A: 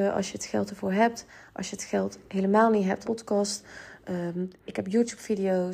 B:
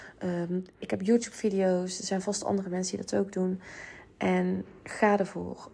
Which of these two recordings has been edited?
A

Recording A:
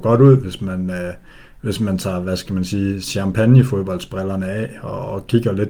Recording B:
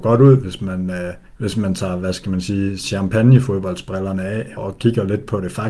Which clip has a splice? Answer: B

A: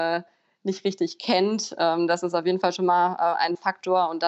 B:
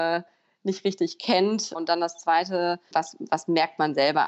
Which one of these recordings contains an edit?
B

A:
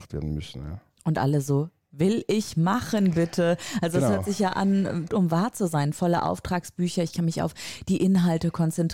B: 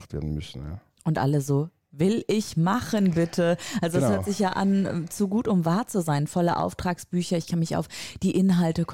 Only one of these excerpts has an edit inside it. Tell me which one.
A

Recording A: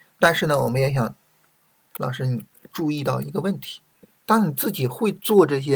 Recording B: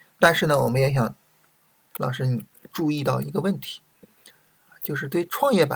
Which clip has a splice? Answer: A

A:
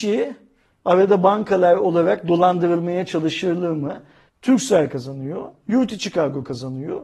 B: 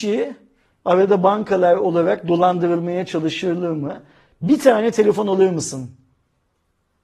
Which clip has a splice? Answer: A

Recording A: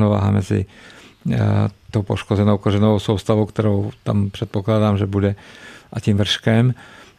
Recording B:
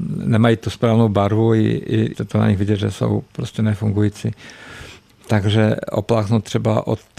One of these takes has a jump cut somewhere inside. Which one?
B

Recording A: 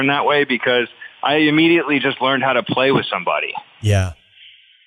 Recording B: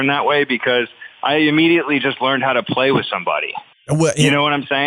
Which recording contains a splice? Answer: B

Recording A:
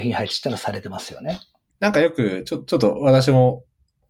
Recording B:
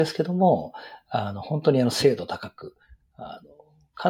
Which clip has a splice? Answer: A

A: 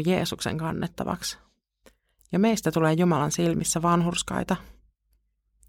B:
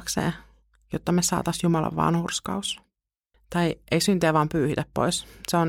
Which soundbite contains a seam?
B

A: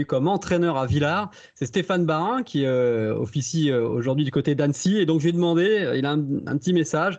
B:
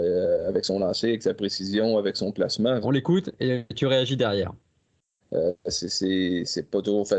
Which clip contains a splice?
B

